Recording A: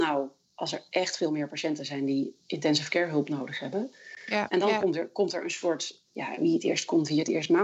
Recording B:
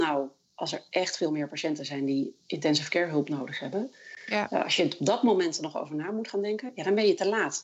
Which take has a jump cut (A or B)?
A